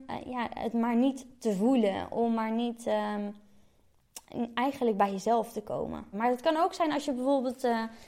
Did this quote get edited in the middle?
yes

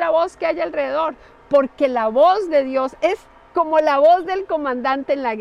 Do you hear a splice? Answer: no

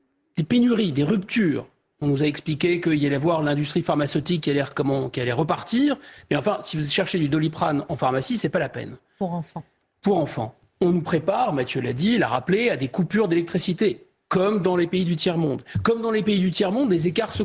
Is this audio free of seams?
yes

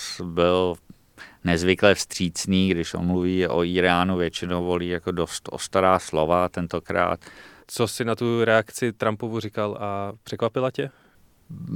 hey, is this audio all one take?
no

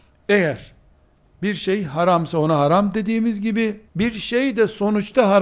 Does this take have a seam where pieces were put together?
yes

